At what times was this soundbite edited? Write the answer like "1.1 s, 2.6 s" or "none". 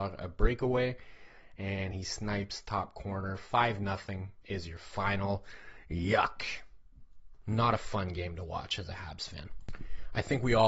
none